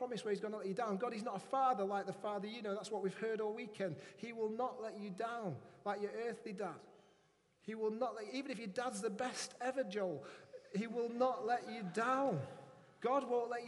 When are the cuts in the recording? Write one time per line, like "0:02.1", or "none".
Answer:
none

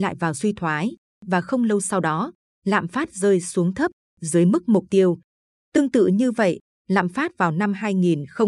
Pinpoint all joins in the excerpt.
none

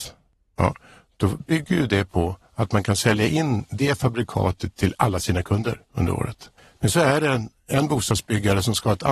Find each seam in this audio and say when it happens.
none

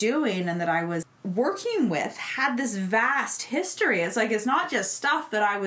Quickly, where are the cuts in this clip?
none

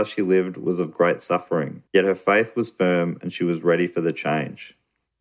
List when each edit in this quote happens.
none

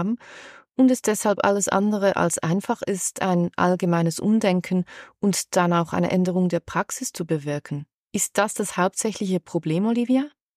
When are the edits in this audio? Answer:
none

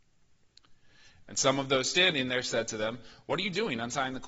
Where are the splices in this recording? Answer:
0:01.2

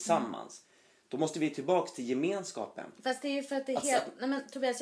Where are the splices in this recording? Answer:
none

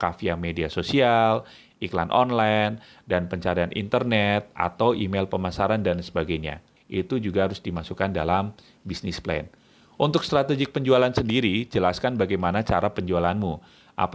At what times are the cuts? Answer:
0:06.8

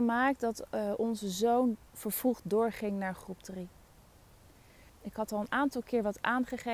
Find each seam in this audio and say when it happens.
0:04.9

